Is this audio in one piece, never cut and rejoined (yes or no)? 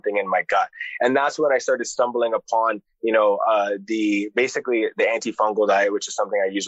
yes